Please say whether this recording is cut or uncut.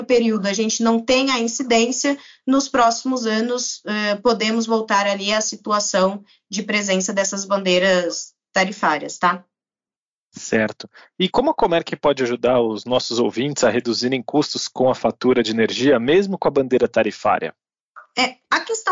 uncut